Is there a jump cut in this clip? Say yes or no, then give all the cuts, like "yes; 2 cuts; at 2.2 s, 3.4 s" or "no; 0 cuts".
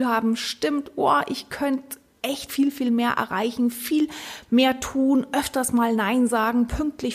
no; 0 cuts